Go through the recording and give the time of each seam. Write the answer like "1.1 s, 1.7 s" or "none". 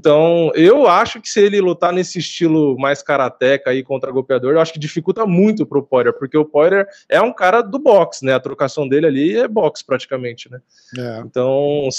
none